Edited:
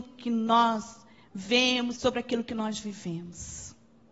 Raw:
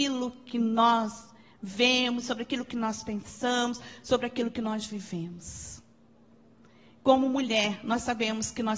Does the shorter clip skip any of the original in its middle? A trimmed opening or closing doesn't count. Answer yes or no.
yes